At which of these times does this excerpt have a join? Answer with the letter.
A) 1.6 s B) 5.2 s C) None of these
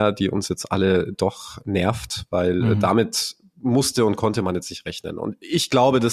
A